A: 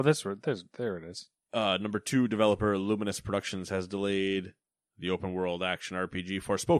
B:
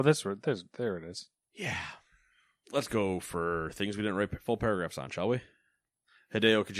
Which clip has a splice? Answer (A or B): B